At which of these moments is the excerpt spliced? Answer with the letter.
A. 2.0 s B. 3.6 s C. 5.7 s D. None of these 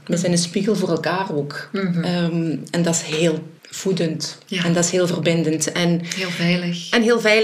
B